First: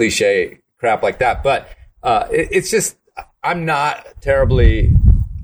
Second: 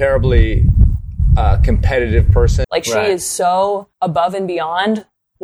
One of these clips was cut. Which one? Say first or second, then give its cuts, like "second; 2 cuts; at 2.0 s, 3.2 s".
second; 2 cuts; at 2.6 s, 3.9 s